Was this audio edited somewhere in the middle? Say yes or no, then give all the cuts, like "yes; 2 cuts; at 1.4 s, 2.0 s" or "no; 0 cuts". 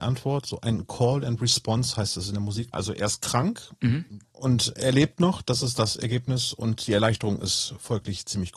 yes; 2 cuts; at 2.7 s, 4.2 s